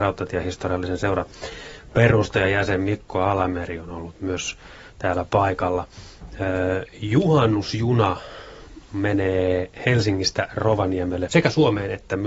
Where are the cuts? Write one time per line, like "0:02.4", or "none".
0:11.3

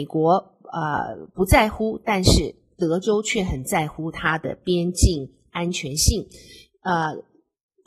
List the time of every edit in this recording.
none

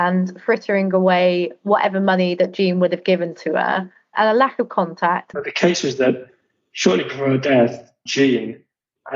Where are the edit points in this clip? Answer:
0:05.3
0:08.1

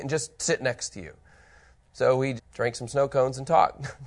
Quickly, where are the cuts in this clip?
0:02.4

